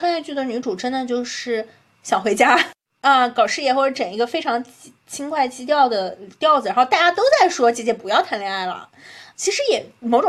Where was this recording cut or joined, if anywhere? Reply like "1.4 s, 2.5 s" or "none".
9.3 s